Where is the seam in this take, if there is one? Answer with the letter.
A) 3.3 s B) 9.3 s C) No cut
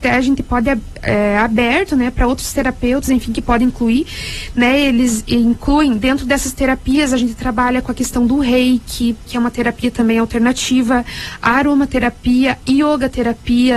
B